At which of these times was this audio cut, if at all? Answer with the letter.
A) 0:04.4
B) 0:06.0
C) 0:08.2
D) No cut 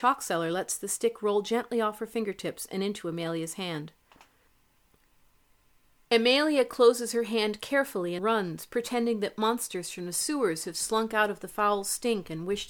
C